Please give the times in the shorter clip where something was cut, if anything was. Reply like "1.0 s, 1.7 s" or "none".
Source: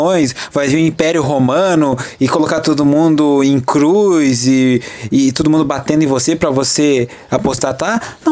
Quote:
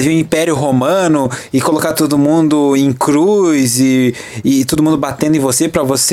none

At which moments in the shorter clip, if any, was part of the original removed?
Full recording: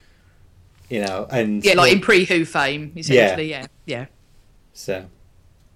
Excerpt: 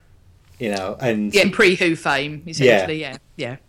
1.4 s

